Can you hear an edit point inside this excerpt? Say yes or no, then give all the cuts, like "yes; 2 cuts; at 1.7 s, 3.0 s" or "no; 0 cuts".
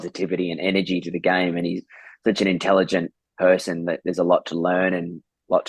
no; 0 cuts